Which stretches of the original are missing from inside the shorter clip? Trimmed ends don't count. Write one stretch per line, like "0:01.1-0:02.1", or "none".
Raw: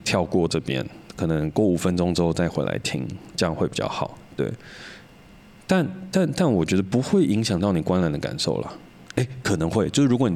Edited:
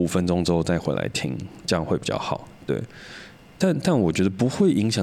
0:05.3-0:06.1